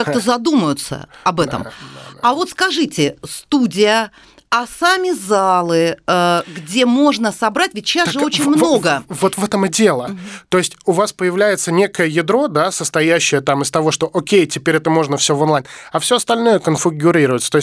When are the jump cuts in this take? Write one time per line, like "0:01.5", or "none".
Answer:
none